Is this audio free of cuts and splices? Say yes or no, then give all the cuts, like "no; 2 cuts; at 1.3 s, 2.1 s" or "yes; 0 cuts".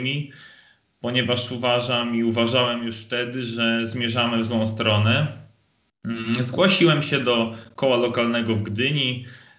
yes; 0 cuts